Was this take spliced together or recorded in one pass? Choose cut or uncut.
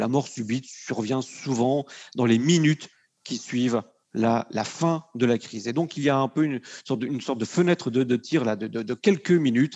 uncut